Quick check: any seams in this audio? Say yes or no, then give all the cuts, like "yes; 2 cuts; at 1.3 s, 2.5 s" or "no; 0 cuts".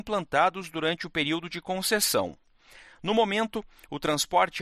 no; 0 cuts